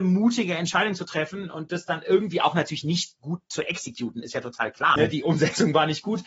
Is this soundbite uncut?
no; 1 cut; at 5.0 s

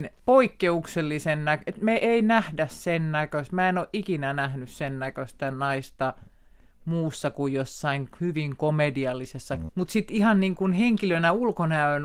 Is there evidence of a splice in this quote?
yes; 1 cut; at 9.7 s

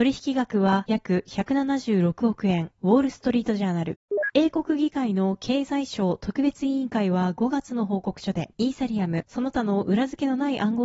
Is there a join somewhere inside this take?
yes; 2 cuts; at 4.3 s, 8.5 s

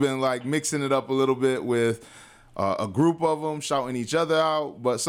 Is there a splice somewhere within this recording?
no; 0 cuts

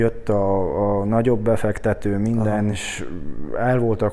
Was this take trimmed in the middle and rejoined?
no; 0 cuts

